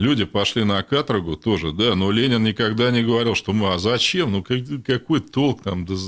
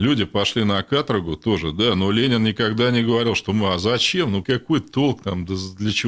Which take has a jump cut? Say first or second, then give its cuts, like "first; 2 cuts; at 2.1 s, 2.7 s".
second; 1 cut; at 4.4 s